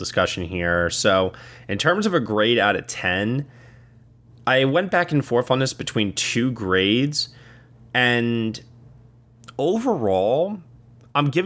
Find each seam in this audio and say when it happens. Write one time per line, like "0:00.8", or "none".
none

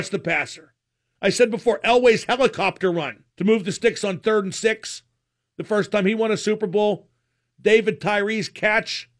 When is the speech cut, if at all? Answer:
0:01.2
0:03.3

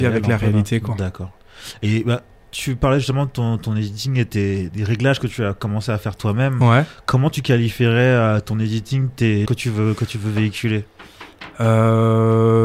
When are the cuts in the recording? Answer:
0:04.7
0:09.5

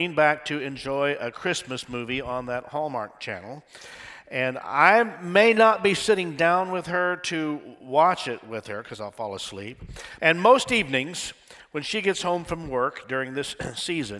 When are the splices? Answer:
0:10.2

